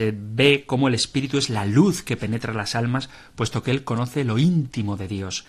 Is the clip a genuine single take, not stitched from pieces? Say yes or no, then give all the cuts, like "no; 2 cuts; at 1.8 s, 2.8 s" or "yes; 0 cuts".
yes; 0 cuts